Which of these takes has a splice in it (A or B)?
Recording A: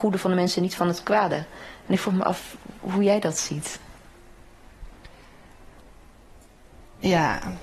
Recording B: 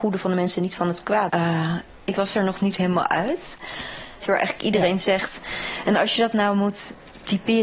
B